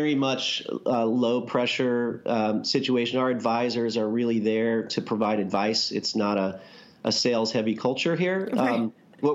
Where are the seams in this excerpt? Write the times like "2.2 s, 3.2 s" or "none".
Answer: none